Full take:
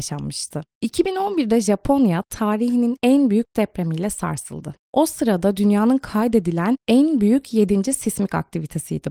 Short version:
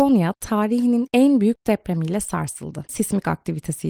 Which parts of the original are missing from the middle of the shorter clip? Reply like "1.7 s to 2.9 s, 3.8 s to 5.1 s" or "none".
4.8 s to 8.0 s